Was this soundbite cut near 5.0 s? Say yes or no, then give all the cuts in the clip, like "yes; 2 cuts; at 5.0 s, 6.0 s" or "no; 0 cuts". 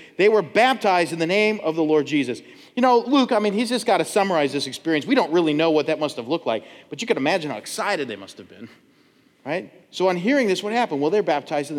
no; 0 cuts